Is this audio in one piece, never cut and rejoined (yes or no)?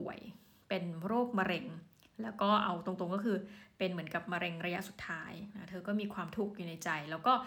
yes